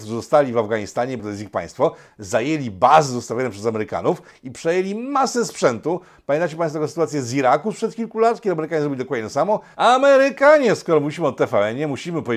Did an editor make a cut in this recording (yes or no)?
yes